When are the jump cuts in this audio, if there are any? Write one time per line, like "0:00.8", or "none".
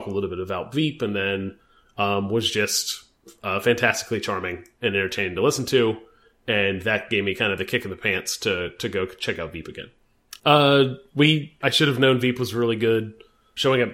0:10.4
0:11.6